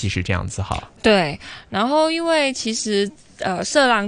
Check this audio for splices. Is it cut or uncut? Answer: uncut